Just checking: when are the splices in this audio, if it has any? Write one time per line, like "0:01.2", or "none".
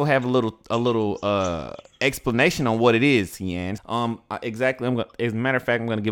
0:03.8